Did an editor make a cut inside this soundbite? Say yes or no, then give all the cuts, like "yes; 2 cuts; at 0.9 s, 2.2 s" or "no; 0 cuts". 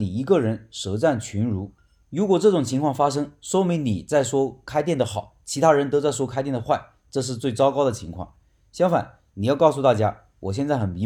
no; 0 cuts